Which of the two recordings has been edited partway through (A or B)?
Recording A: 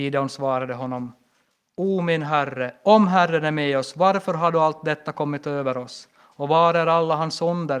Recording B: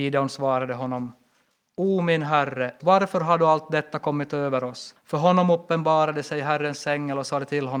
B